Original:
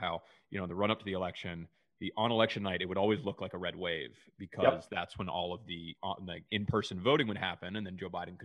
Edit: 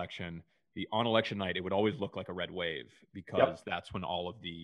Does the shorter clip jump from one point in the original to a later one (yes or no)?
no